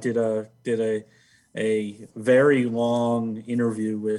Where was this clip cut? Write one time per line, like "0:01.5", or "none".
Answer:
none